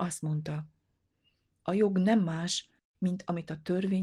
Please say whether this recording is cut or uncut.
uncut